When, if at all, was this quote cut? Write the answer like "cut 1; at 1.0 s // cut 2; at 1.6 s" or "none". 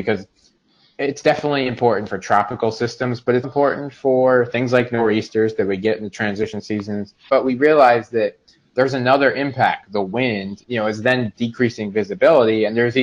cut 1; at 3.4 s // cut 2; at 7.3 s // cut 3; at 10.6 s

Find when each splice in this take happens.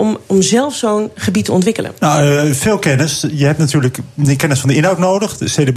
cut 1; at 2.0 s

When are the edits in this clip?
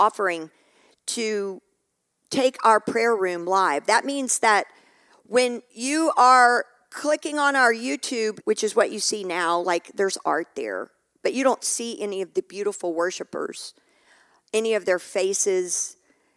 cut 1; at 8.4 s

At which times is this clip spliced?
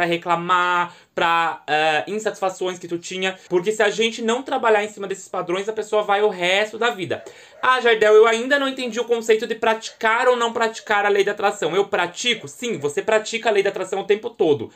cut 1; at 3.5 s

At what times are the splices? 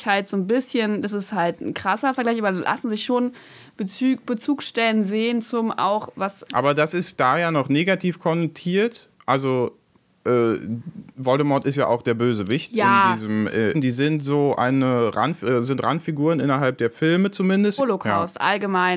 cut 1; at 6.5 s // cut 2; at 13.7 s // cut 3; at 17.8 s

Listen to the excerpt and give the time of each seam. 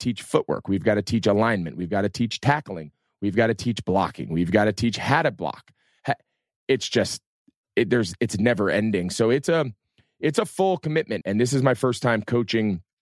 cut 1; at 11.2 s

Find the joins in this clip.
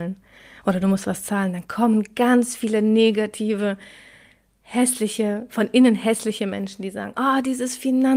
none

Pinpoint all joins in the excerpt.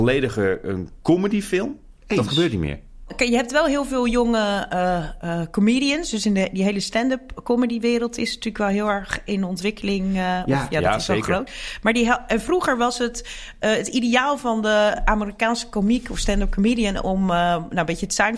none

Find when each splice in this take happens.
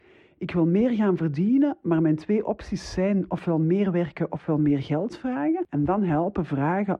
cut 1; at 5.7 s

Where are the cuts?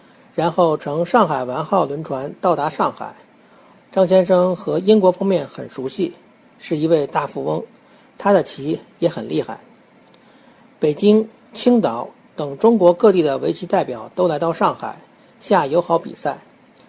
cut 1; at 3.7 s

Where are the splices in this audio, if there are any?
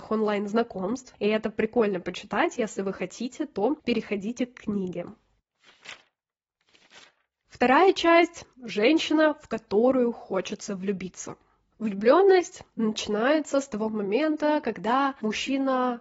none

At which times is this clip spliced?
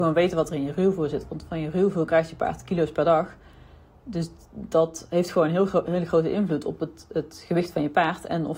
none

